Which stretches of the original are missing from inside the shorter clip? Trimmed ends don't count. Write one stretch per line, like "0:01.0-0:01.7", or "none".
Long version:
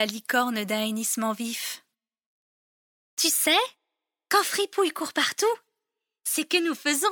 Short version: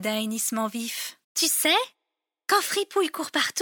0:01.9-0:03.0